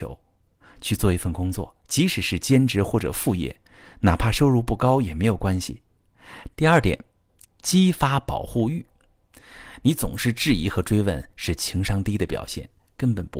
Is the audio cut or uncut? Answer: cut